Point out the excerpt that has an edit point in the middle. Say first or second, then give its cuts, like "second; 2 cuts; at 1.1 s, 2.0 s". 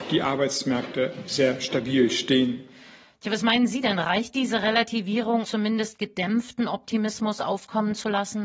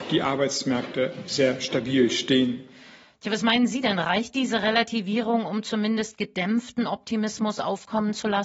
first; 1 cut; at 5.4 s